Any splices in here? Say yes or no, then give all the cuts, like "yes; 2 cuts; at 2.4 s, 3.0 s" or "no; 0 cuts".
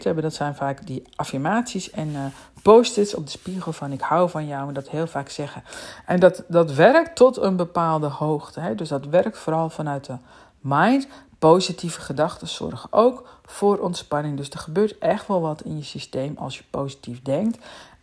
no; 0 cuts